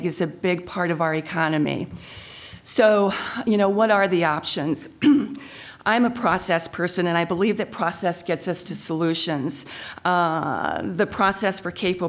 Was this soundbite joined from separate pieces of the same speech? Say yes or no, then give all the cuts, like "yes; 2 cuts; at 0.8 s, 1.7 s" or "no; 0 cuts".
no; 0 cuts